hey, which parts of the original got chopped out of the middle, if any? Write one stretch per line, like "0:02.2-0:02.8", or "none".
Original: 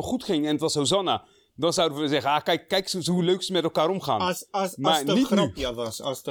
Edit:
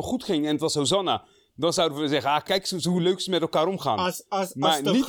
0:02.4-0:02.7